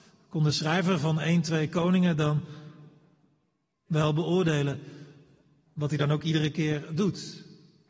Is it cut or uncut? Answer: uncut